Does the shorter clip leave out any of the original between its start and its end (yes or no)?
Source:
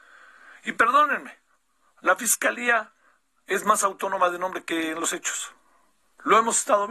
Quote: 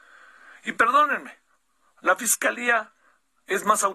no